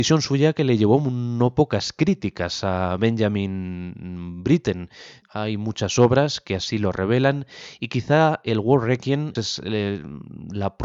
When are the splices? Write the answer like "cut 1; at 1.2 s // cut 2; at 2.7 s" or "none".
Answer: cut 1; at 5.2 s // cut 2; at 9.4 s